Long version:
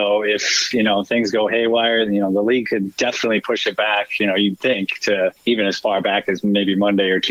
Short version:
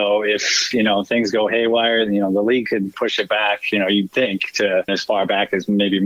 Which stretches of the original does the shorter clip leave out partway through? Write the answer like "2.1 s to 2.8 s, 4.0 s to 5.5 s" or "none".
2.9 s to 3.4 s, 5.4 s to 5.6 s